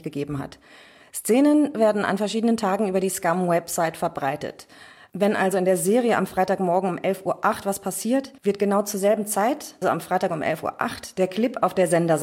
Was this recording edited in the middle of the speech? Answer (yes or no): yes